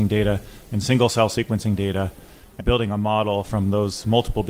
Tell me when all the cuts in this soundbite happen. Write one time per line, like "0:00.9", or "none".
0:02.6